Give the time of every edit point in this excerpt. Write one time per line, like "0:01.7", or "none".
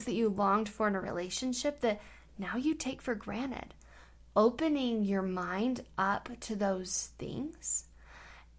none